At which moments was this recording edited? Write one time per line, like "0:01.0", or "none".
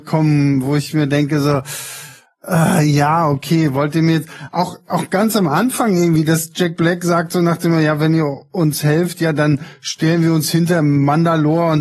none

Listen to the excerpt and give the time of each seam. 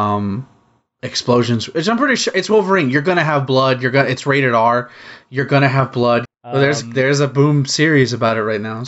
0:06.2

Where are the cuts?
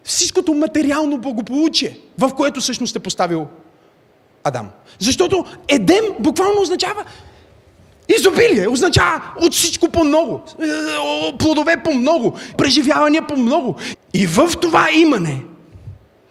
0:12.5
0:13.9

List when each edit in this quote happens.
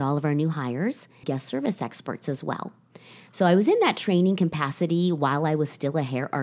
0:01.2

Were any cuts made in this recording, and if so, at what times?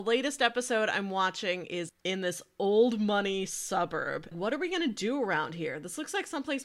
0:01.9
0:04.3

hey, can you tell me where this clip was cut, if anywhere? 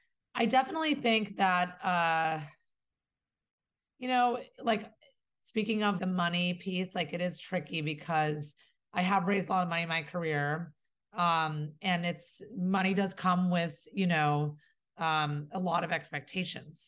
0:04.6
0:06.0

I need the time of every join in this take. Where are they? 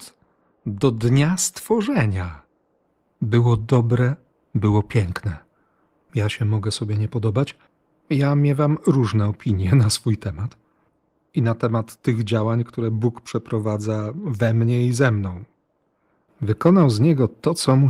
0:16.3

